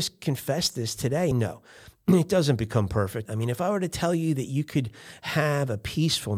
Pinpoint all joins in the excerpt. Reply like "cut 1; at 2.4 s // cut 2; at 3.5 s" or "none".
cut 1; at 1.3 s // cut 2; at 3.3 s

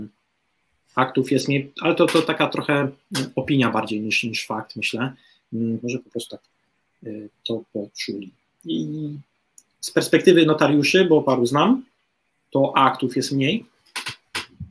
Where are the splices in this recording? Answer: cut 1; at 5.8 s

